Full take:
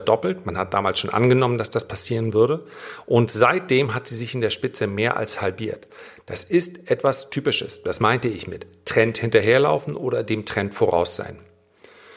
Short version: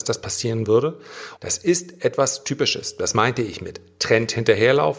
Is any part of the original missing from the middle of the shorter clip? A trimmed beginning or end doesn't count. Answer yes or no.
yes